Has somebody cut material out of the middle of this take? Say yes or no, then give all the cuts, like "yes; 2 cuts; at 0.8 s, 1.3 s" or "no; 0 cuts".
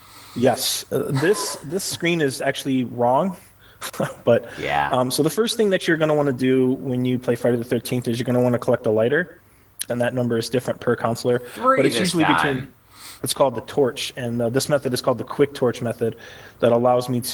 yes; 2 cuts; at 9.9 s, 13.2 s